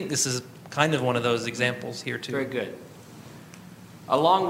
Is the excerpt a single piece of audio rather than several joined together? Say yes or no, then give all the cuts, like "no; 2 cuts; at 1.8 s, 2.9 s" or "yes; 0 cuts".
yes; 0 cuts